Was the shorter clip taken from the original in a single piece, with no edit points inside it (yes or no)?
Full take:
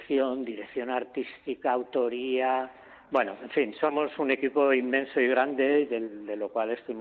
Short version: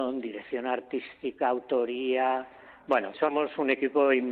no